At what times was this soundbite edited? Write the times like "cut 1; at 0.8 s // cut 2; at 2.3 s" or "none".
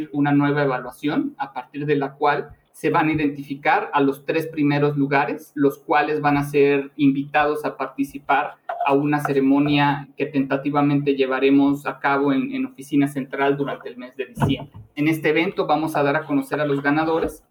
none